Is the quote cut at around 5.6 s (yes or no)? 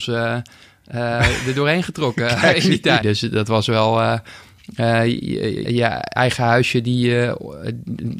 yes